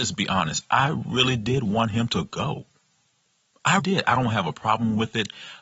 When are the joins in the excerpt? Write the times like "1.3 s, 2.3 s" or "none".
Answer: 3.8 s